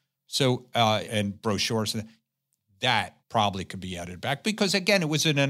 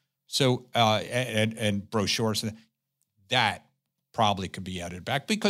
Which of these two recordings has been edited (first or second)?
first